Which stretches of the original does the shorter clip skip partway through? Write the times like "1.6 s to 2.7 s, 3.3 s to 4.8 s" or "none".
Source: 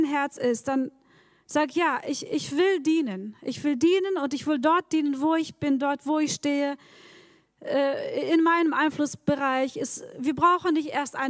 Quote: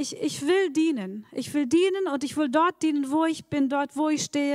none